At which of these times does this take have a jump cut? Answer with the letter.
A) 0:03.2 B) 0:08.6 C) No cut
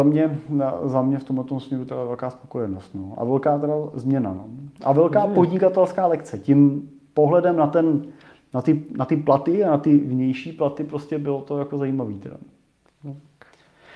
C